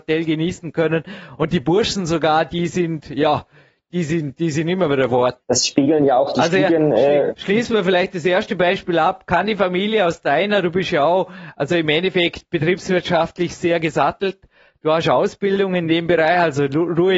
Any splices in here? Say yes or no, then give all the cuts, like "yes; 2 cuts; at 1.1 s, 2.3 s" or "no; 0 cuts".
yes; 1 cut; at 5.4 s